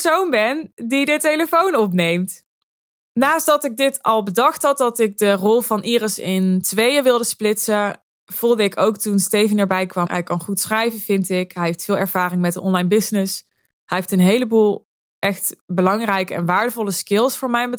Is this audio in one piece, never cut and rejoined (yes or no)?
no